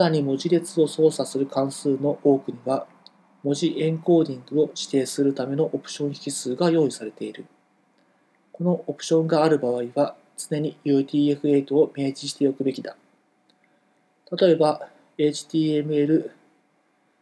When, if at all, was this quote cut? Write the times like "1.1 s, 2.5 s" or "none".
none